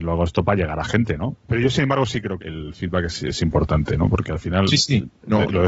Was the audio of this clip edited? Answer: yes; 2 cuts; at 1.4 s, 2.4 s

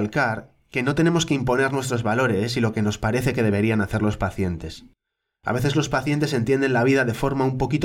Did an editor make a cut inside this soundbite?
no; 0 cuts

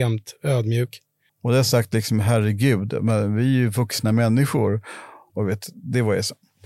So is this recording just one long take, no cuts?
no; 2 cuts; at 1.3 s, 5.3 s

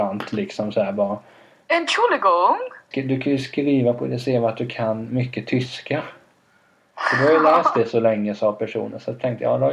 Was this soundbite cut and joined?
yes; 1 cut; at 2.9 s

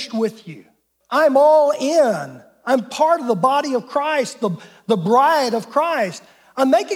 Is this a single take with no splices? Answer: no; 1 cut; at 1.0 s

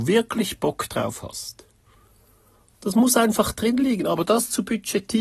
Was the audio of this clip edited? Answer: no; 0 cuts

